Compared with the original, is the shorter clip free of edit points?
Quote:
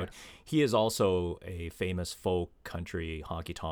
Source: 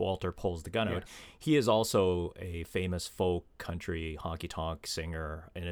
yes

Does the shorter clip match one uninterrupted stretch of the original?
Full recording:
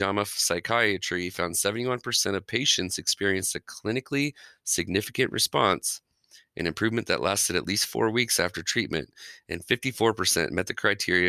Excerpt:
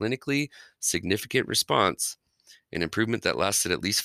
yes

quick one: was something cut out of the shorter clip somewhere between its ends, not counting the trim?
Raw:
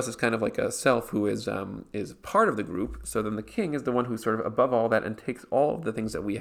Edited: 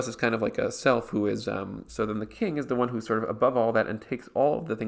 yes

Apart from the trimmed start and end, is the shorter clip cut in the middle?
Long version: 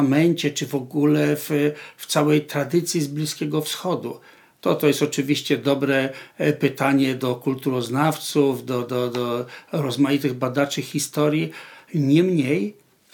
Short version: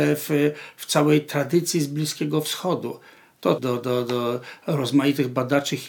yes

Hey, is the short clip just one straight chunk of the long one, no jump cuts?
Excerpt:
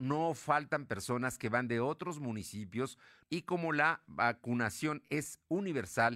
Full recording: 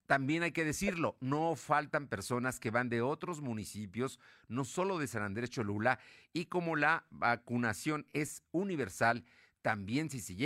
no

